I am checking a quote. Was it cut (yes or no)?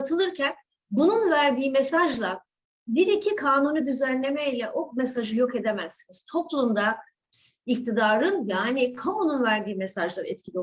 no